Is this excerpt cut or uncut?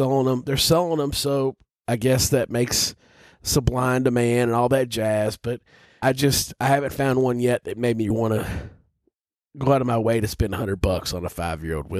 cut